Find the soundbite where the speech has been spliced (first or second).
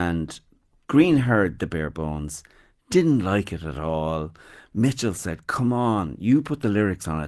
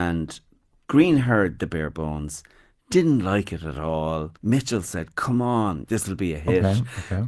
second